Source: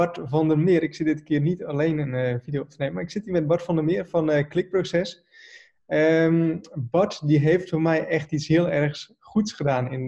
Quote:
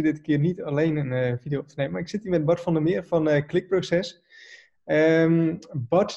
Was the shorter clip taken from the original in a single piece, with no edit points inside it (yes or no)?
yes